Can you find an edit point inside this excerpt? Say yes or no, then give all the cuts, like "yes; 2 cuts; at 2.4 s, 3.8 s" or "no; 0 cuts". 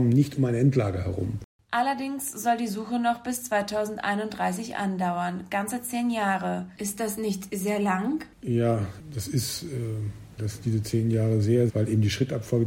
yes; 3 cuts; at 8.3 s, 10.4 s, 11.7 s